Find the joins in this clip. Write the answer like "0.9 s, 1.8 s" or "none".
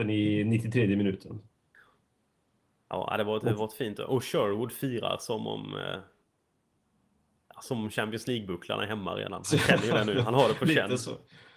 none